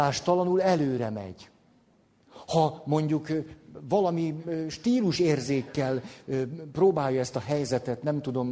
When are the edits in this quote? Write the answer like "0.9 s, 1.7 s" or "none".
none